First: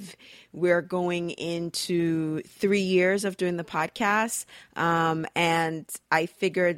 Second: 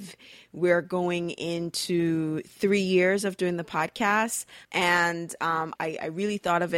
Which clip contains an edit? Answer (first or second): second